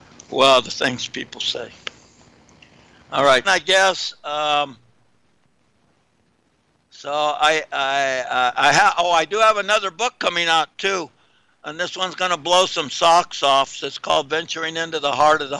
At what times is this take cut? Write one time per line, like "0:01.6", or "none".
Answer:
0:03.4